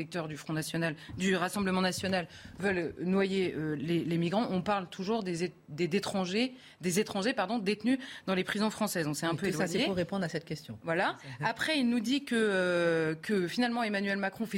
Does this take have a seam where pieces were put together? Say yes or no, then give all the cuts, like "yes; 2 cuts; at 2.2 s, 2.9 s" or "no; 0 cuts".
no; 0 cuts